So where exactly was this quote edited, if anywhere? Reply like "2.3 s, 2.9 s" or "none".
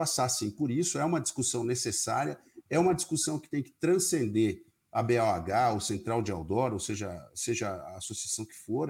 none